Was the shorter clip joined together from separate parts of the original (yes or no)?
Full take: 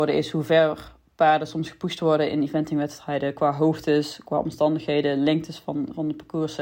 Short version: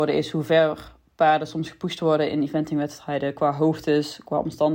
no